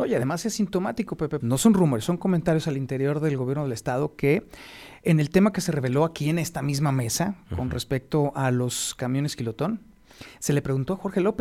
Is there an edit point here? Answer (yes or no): yes